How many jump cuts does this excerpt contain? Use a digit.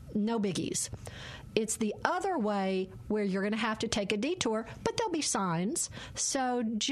0